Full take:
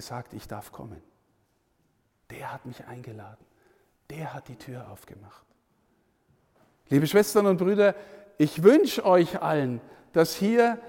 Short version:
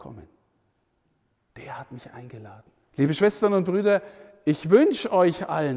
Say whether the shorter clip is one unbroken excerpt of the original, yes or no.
no